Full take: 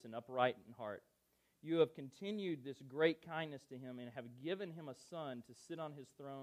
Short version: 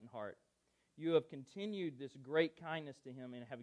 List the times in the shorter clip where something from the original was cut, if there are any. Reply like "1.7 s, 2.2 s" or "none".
none